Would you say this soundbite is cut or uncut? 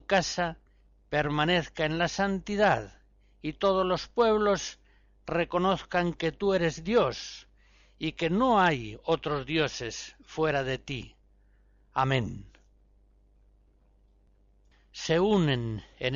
uncut